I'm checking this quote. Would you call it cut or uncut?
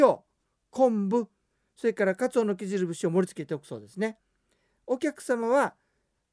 uncut